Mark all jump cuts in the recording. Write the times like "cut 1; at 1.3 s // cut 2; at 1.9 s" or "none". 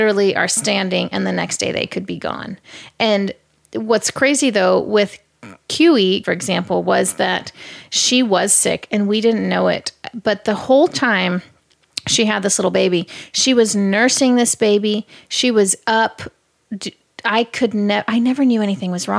cut 1; at 6.2 s